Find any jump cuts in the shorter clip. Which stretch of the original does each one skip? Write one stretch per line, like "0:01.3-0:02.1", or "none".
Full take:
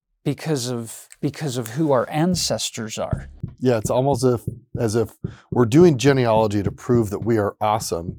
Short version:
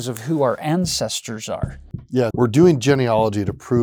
0:03.8-0:05.5